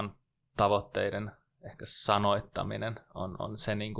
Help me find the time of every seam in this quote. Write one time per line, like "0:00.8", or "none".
none

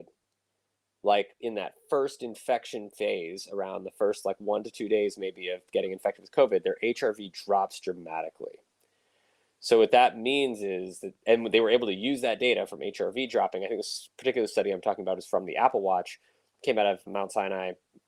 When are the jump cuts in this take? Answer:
0:17.1

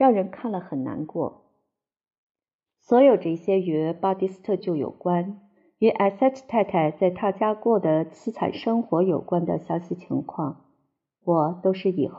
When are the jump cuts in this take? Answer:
0:02.7
0:04.6

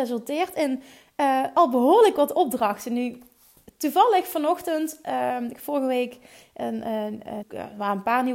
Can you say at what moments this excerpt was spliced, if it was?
0:07.4

